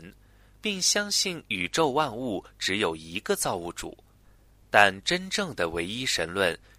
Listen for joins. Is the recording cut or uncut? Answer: uncut